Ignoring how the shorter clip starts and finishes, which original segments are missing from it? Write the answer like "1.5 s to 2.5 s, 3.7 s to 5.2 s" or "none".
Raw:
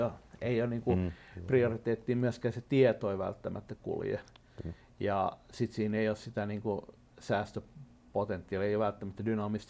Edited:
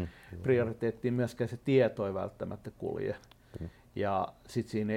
none